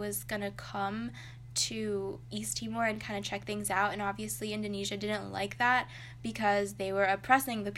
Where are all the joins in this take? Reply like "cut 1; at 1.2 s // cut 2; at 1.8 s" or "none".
none